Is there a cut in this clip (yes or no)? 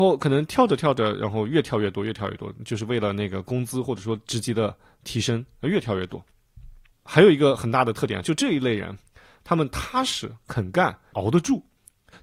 yes